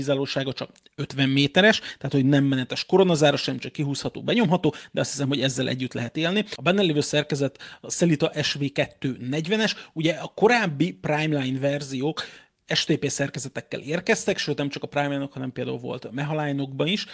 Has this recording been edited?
no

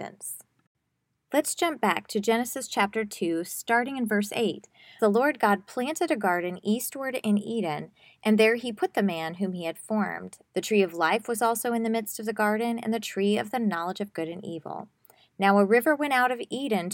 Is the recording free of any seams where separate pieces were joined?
no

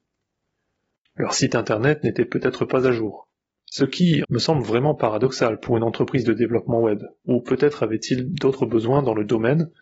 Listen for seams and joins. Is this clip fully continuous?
no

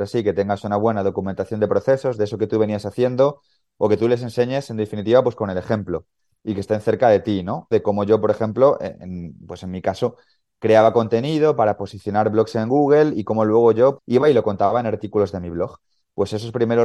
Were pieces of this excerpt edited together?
yes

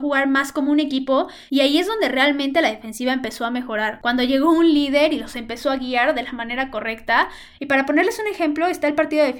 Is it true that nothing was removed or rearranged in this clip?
yes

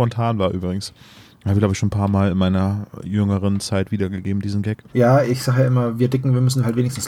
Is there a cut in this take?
yes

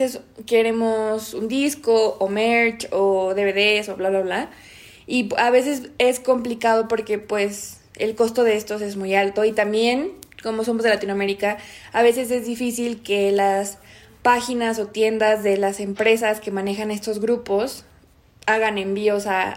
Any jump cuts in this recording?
no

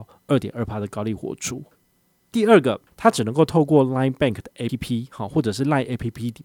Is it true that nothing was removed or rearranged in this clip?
no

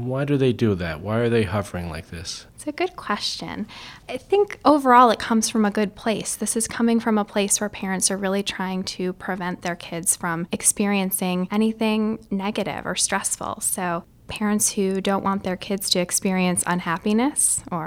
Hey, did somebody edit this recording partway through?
no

